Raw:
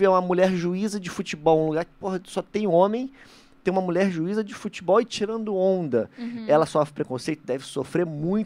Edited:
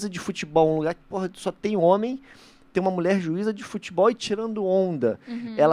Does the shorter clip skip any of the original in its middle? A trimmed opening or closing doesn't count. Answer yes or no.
no